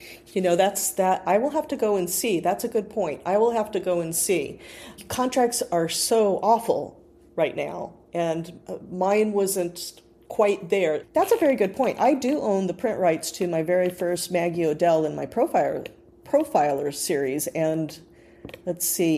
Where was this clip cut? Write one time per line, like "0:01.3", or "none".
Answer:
none